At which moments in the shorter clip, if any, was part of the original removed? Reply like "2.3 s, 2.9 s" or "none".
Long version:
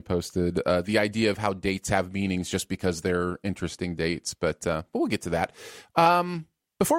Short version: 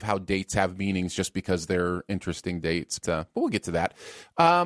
3.0 s